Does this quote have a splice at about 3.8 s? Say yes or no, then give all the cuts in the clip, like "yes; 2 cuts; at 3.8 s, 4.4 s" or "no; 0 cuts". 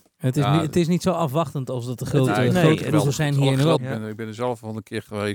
yes; 1 cut; at 3.8 s